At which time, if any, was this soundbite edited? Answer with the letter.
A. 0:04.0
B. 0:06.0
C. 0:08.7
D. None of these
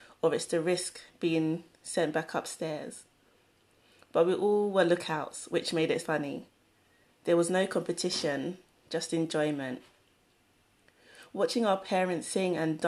B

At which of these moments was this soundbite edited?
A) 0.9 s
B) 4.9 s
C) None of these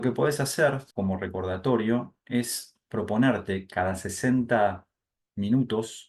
A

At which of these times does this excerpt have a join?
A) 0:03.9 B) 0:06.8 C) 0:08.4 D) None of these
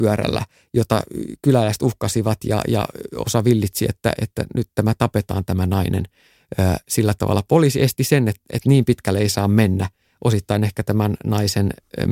D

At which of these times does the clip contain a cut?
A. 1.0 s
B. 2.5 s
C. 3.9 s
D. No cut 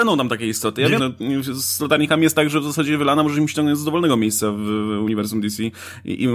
A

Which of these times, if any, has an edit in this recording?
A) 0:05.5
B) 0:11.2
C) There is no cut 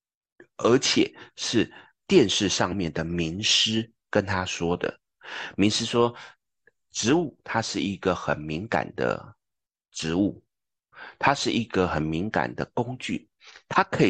A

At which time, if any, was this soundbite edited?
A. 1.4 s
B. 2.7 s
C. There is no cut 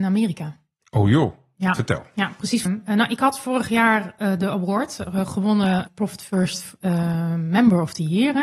B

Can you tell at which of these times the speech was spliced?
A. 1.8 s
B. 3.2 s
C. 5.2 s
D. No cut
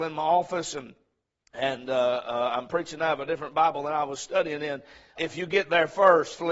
C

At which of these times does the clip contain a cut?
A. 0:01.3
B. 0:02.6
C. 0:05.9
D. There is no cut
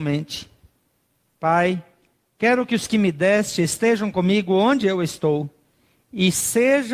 A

